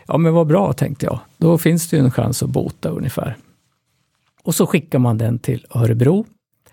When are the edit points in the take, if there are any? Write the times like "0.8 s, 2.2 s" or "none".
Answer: none